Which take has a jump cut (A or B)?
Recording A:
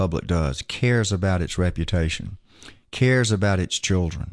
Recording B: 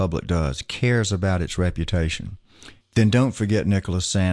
B